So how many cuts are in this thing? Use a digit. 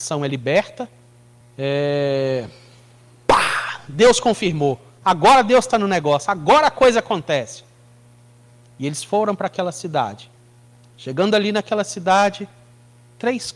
2